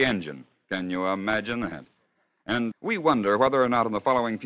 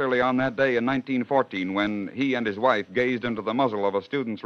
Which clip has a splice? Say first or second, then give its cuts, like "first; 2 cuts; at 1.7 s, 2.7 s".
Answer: first; 1 cut; at 2.7 s